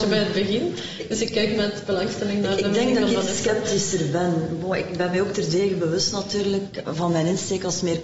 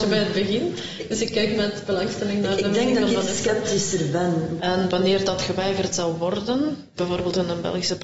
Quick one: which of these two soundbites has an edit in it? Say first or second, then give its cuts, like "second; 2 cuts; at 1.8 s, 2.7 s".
second; 2 cuts; at 4.6 s, 7.0 s